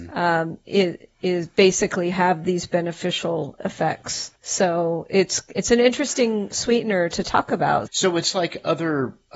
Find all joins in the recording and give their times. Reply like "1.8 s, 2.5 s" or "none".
4.4 s, 6.5 s, 7.9 s